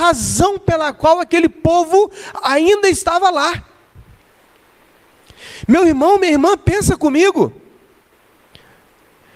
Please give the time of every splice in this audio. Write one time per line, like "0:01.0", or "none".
none